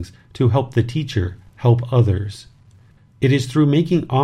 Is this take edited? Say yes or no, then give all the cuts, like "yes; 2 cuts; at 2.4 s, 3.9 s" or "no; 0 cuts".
yes; 1 cut; at 3.0 s